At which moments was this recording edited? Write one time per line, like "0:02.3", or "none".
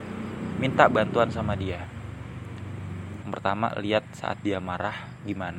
0:03.2